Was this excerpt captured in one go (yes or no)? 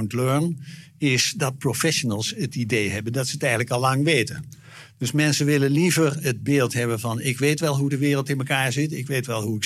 yes